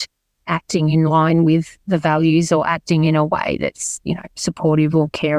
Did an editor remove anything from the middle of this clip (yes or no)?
no